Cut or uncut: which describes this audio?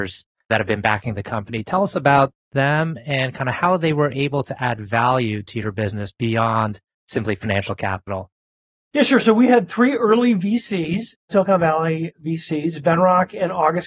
uncut